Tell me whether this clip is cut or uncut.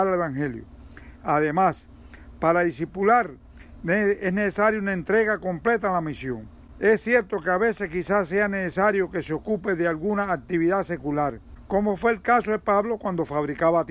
uncut